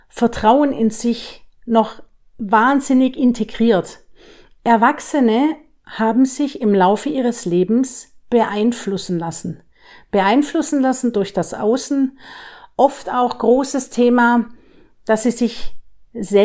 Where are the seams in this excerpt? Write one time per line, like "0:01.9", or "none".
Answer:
none